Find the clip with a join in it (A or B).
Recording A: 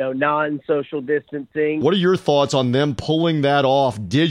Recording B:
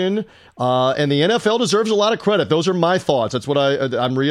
A